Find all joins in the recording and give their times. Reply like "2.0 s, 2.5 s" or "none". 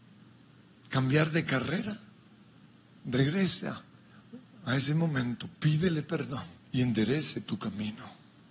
3.0 s, 6.6 s